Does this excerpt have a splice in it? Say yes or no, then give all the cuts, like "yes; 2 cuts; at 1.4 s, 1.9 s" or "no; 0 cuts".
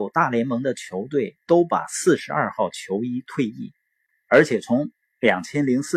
yes; 1 cut; at 4.1 s